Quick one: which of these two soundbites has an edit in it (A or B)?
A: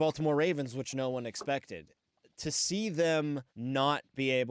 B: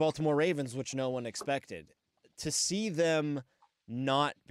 A